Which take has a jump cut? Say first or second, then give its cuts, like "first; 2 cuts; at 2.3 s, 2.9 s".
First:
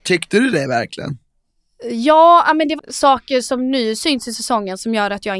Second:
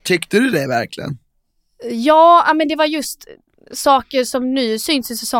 first; 1 cut; at 2.8 s